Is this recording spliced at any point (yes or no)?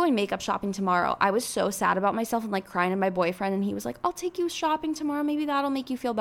no